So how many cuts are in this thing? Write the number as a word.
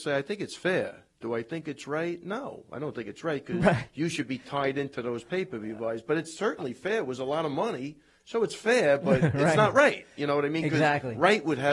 zero